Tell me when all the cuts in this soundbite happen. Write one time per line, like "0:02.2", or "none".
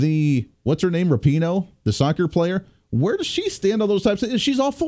none